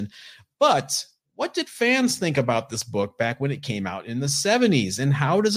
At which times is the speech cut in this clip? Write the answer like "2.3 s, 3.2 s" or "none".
none